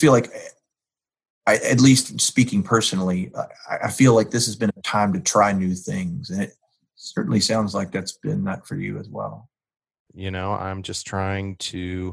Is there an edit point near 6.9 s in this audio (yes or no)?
no